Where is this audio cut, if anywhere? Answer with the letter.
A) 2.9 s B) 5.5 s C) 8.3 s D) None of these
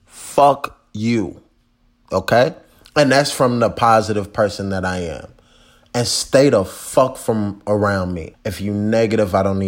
C